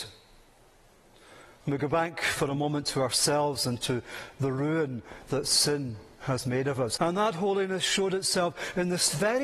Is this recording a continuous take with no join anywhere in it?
no; 1 cut; at 7.0 s

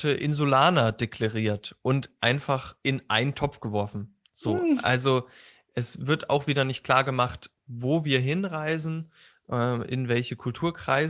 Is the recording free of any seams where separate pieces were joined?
yes; 0 cuts

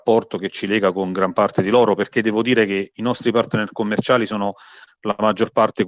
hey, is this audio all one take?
yes; 0 cuts

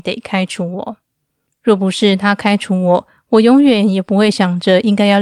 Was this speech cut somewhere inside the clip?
yes; 1 cut; at 1.5 s

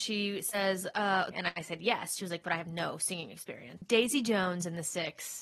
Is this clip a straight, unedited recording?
no; 2 cuts; at 1.3 s, 3.8 s

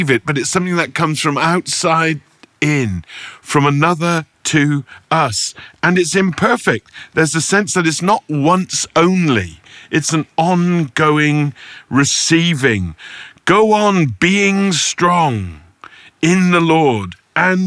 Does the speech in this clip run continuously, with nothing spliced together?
yes; 0 cuts

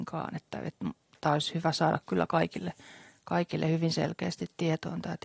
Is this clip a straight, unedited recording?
yes; 0 cuts

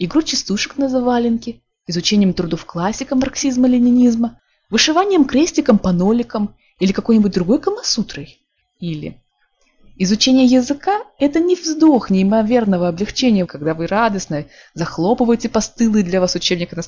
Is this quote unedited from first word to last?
no; 2 cuts; at 8.6 s, 13.4 s

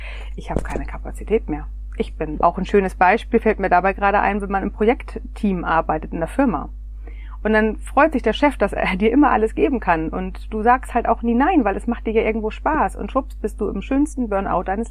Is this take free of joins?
no; 2 cuts; at 2.4 s, 7.4 s

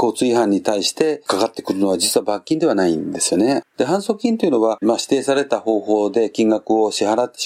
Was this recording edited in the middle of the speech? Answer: yes; 2 cuts; at 3.6 s, 4.8 s

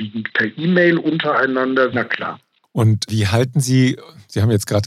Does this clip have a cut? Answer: yes; 1 cut; at 1.9 s

